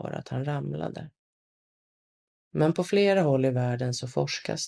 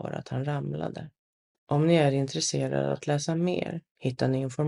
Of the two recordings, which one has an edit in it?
second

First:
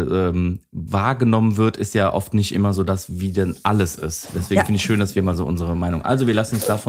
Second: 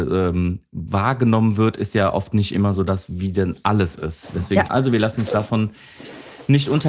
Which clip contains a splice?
second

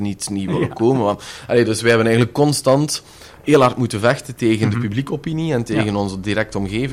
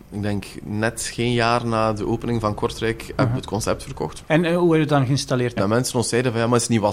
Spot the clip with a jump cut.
second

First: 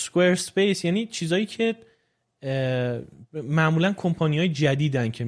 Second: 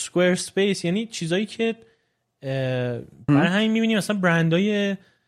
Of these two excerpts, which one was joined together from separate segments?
second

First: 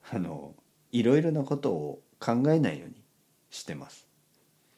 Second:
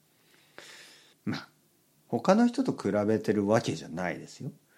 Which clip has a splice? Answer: second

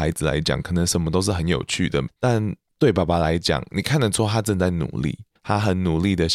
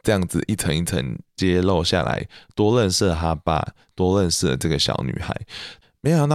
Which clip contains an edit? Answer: first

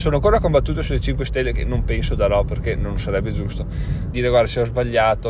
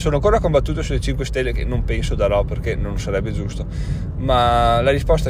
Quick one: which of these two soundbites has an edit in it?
first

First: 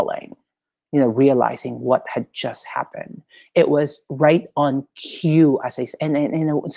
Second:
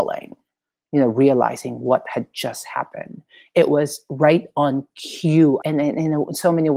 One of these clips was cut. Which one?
second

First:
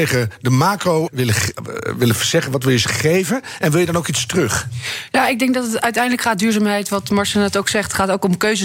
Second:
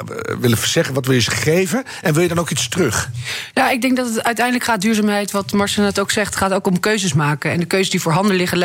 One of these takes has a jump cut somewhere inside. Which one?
first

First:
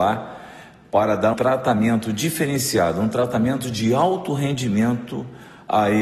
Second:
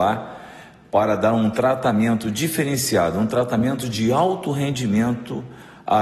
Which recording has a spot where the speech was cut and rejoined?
first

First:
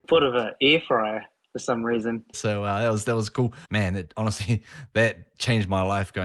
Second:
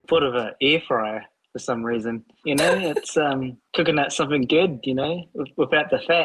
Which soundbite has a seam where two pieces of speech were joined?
first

